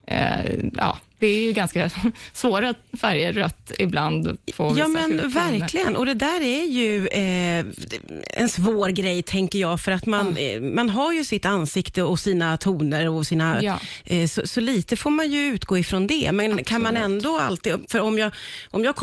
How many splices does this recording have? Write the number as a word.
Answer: zero